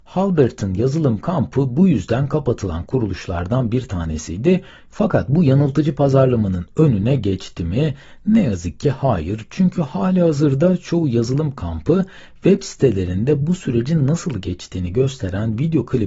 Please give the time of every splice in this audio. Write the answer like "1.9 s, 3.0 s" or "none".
4.9 s